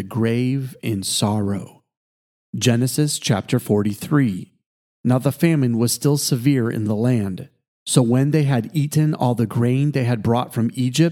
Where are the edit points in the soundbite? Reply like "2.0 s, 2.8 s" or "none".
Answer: none